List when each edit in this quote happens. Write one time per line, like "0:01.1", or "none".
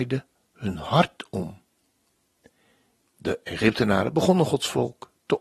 0:03.0